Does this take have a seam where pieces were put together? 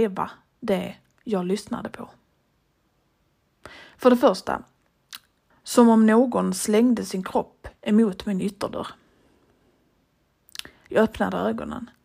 yes; 1 cut; at 5.5 s

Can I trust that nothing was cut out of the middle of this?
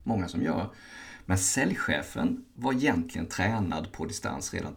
no; 1 cut; at 1.2 s

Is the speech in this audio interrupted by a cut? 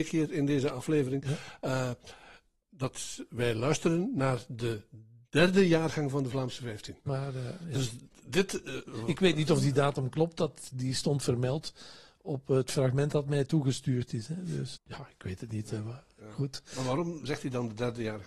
yes; 2 cuts; at 7.1 s, 14.7 s

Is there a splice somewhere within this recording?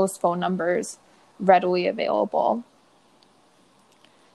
no; 0 cuts

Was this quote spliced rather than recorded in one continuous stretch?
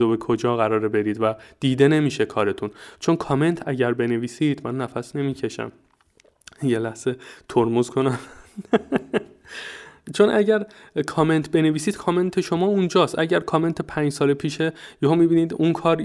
no; 0 cuts

